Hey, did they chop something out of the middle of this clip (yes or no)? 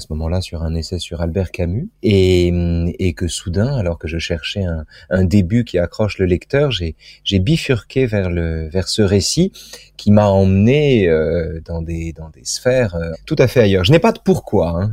yes